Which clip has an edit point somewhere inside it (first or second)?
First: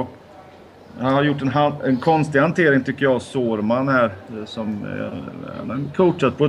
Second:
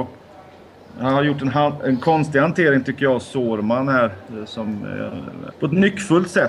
second